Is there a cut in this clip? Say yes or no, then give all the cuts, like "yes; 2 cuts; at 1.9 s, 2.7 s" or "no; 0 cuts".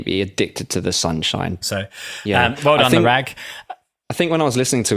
yes; 1 cut; at 1.6 s